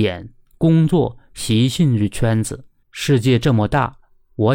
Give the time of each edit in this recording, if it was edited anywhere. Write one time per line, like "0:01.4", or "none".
0:02.8